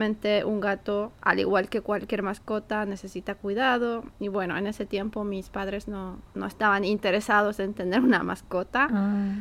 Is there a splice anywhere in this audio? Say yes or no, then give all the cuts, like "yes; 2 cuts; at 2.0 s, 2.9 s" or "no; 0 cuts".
yes; 1 cut; at 6.3 s